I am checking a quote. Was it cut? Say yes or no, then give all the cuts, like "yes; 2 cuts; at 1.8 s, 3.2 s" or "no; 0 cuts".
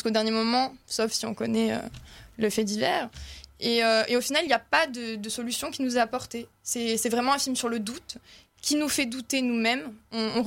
no; 0 cuts